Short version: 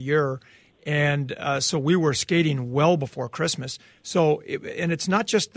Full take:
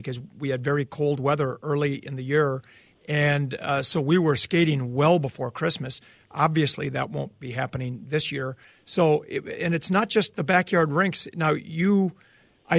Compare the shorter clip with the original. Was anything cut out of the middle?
yes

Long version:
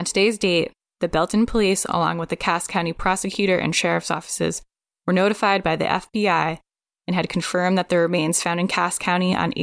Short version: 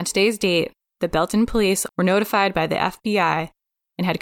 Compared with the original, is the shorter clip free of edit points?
no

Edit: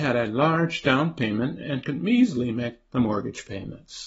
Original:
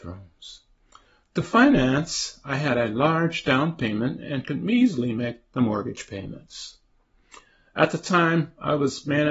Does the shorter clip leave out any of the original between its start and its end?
no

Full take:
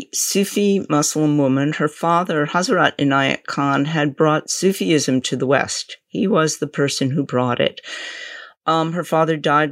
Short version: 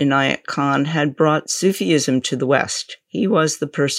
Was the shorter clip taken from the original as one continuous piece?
yes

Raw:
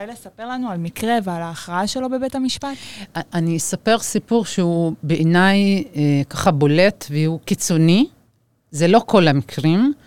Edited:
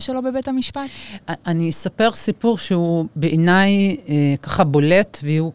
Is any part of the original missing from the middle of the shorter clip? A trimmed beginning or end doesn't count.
no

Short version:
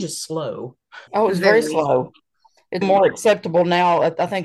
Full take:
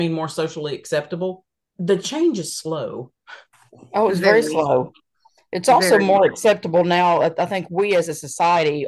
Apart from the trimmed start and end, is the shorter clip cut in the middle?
yes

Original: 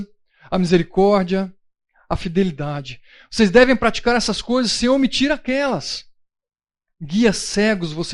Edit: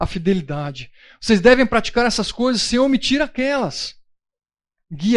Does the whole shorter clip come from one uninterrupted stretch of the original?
yes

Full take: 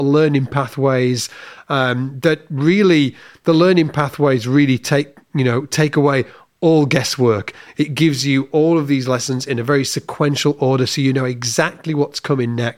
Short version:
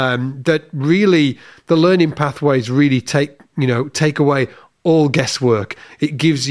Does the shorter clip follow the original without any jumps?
yes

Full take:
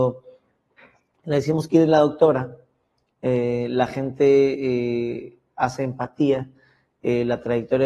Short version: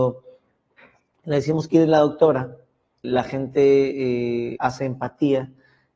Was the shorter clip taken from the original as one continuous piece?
no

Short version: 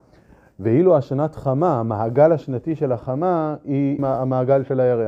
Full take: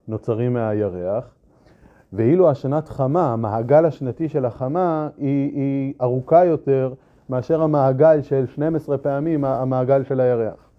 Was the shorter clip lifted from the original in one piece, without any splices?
no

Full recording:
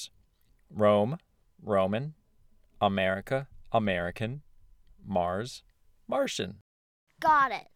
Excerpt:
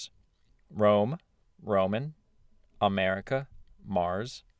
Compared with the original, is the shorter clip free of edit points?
no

